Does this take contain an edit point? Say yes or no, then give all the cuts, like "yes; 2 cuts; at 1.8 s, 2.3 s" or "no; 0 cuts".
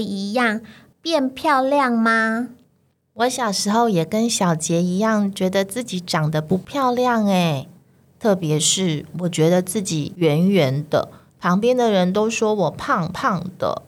no; 0 cuts